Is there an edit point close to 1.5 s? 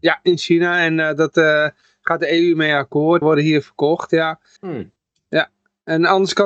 no; 2 cuts; at 3.2 s, 4.6 s

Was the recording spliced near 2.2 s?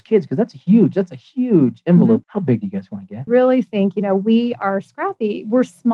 yes; 2 cuts; at 2.2 s, 3.3 s

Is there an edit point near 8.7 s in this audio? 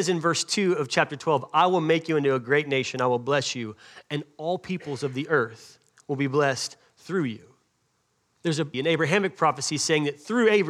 yes; 1 cut; at 8.7 s

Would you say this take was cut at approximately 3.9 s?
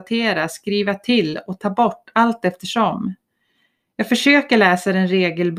no; 0 cuts

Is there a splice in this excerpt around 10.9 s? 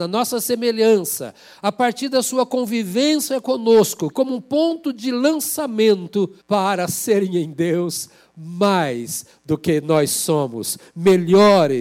no; 2 cuts; at 4.1 s, 6.4 s

